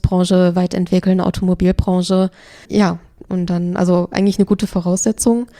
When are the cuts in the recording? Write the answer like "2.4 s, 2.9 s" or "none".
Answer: 2.6 s